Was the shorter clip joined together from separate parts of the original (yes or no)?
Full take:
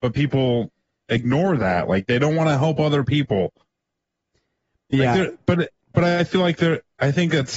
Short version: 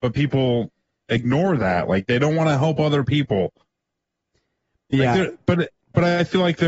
no